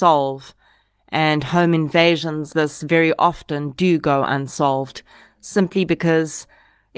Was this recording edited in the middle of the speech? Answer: yes; 1 cut; at 2.5 s

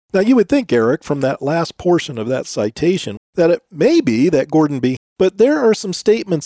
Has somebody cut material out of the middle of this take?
yes; 2 cuts; at 3.2 s, 5.0 s

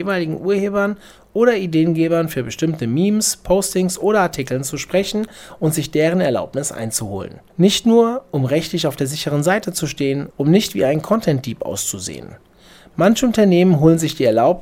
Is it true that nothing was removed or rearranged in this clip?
no; 2 cuts; at 7.5 s, 10.3 s

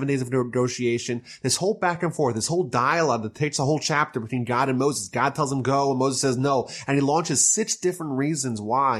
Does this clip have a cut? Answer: no; 0 cuts

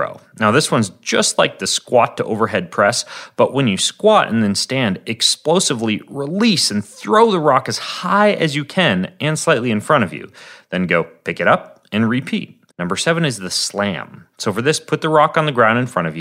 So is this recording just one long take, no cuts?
no; 1 cut; at 12.7 s

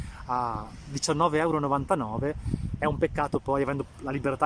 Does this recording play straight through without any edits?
no; 1 cut; at 2.8 s

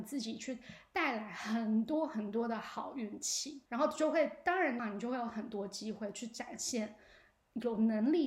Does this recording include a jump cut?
yes; 2 cuts; at 3.7 s, 4.8 s

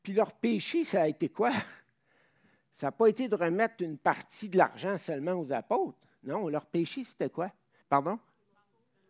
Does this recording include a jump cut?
yes; 1 cut; at 7.8 s

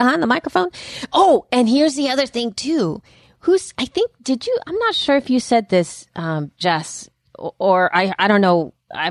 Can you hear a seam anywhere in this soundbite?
no; 0 cuts

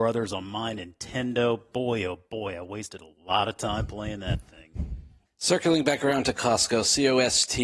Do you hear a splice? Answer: yes; 1 cut; at 5.2 s

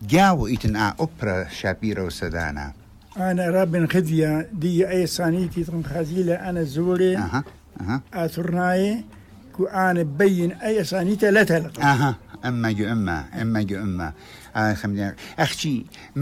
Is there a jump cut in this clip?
no; 0 cuts

